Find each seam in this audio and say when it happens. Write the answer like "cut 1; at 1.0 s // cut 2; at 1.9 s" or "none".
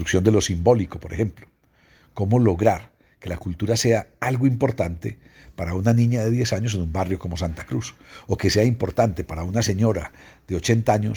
none